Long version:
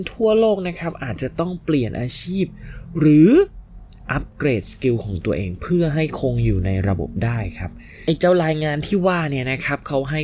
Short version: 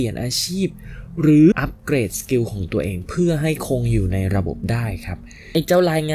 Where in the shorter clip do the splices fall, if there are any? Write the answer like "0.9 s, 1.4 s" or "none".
1.5 s